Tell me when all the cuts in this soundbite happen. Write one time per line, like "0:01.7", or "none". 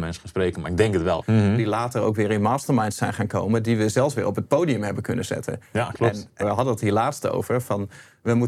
0:01.2
0:06.4